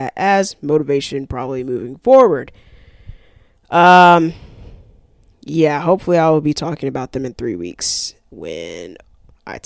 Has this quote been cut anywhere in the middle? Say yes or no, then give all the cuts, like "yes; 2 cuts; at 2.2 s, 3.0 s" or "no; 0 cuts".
no; 0 cuts